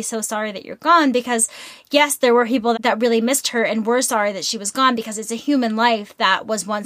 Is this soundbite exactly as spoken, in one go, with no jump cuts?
no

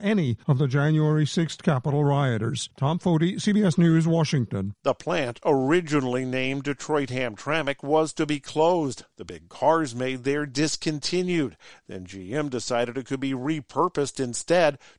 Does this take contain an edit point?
yes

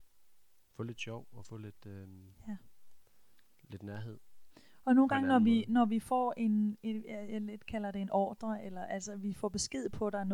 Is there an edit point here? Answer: no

